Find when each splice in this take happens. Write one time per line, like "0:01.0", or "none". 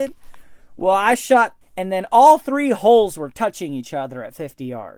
0:01.6